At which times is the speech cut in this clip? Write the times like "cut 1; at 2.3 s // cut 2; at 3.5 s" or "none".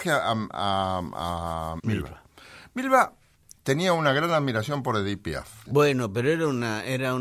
cut 1; at 1.8 s // cut 2; at 5.7 s